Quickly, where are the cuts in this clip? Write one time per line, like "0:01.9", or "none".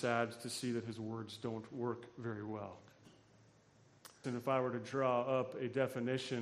0:04.2